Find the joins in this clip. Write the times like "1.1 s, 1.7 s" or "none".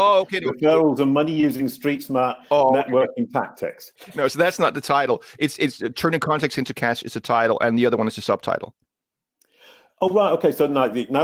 4.0 s

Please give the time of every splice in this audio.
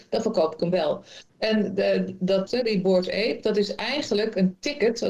1.3 s, 2.5 s

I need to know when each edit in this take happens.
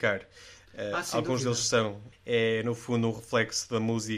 2.1 s

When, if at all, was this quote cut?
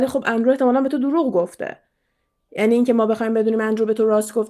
none

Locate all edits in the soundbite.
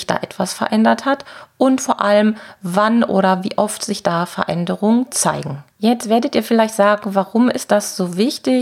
5.7 s

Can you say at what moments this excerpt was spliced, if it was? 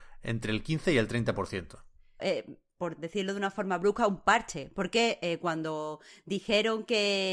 2.2 s

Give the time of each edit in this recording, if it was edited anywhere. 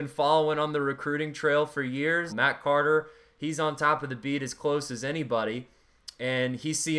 2.3 s

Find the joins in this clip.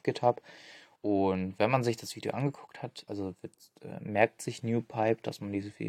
1.0 s, 3.1 s

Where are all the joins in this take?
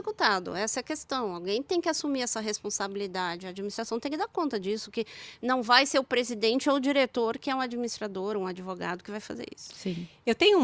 none

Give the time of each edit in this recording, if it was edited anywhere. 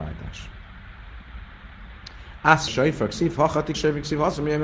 2.7 s, 3.7 s

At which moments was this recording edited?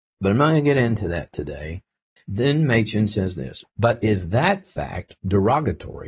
2.2 s, 5.2 s

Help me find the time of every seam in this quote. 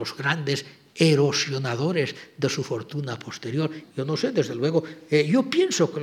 3.8 s

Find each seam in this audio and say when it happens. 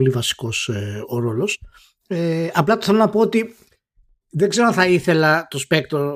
none

